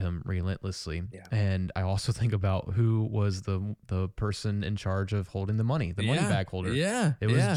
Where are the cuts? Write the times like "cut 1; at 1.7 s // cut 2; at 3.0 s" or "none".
none